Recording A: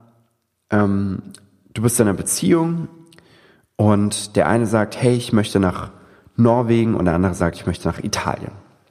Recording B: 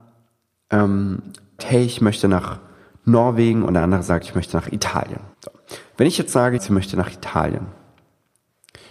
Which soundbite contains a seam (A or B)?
B